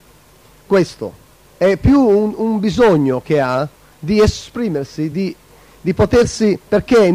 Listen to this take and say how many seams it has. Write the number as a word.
zero